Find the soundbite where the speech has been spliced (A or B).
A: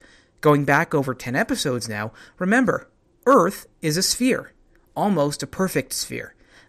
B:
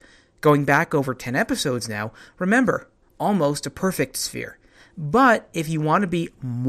B